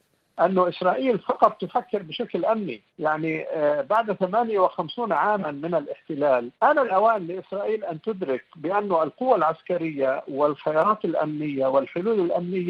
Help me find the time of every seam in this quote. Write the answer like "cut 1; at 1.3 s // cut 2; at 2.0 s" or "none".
cut 1; at 2.9 s // cut 2; at 6.5 s